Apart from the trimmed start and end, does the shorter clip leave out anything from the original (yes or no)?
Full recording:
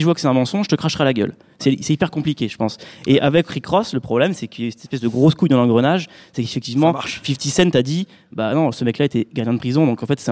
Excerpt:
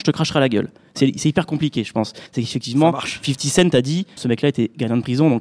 yes